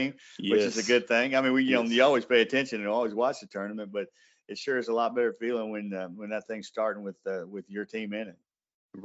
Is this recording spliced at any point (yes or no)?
no